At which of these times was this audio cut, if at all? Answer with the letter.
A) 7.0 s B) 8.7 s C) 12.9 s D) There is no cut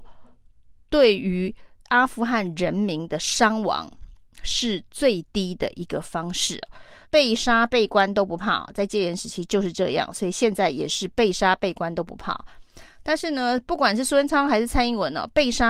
A